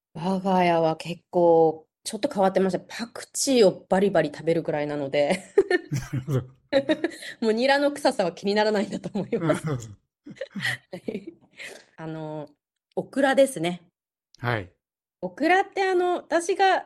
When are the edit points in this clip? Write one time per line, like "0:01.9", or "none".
0:11.9